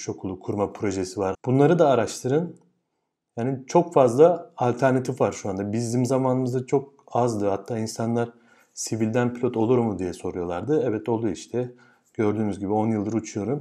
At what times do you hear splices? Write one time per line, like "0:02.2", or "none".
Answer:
0:01.3